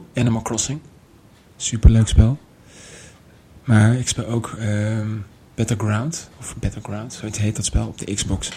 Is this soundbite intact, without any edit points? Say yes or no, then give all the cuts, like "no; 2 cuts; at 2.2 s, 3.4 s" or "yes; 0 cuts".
yes; 0 cuts